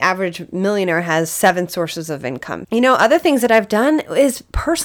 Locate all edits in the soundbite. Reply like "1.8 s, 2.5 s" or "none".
2.6 s